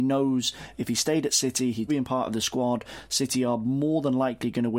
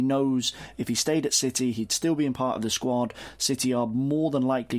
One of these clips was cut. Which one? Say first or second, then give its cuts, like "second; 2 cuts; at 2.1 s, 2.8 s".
first; 1 cut; at 1.9 s